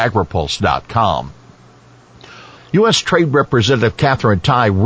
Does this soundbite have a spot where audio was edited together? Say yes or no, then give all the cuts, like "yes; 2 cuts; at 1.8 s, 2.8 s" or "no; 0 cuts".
yes; 1 cut; at 2.6 s